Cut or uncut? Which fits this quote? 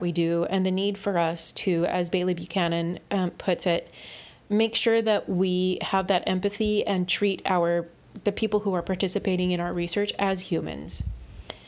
uncut